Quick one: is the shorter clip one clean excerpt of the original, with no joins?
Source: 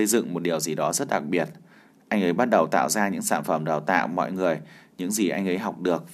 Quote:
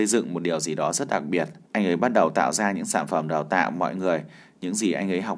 no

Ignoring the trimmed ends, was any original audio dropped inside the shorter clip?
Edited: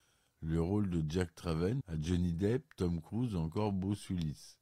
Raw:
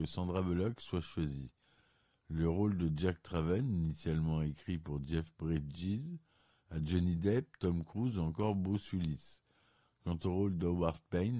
yes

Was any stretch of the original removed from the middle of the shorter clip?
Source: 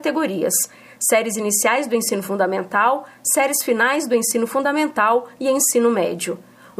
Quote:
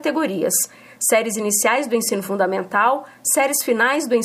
no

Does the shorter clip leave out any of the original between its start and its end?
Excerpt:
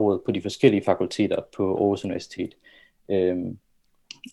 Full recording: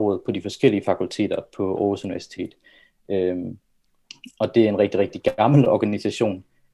no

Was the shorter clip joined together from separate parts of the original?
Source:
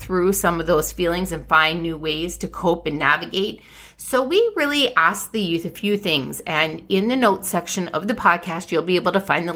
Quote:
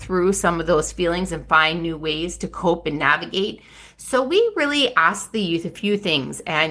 no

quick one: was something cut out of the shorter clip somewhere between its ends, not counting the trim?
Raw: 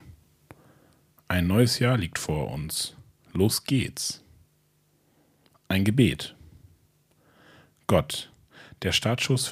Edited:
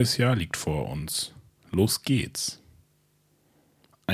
no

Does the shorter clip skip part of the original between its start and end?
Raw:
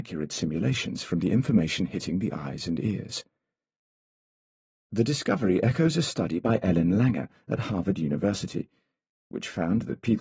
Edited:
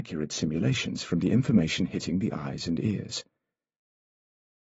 no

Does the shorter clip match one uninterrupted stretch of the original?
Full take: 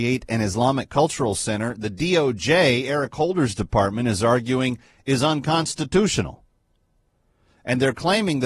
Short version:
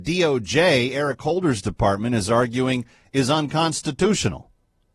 yes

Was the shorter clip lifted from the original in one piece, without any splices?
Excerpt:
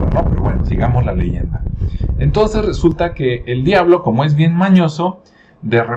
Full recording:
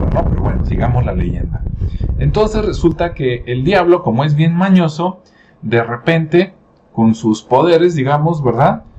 yes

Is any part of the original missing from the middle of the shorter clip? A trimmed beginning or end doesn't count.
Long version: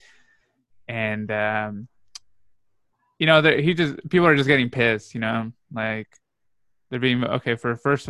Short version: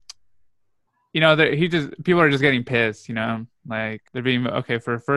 yes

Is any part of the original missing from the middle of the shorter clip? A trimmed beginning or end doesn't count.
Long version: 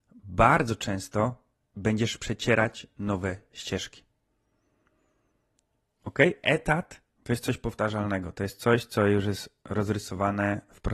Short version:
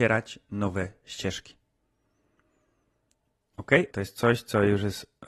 yes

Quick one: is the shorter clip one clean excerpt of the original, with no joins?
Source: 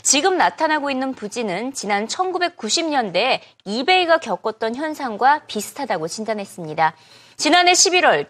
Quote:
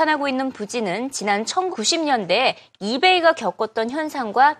no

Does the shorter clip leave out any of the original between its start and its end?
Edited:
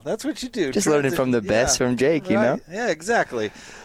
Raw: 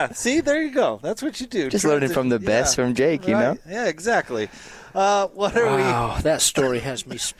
no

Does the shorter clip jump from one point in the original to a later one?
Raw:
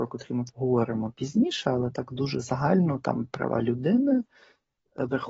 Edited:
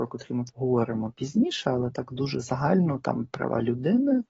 no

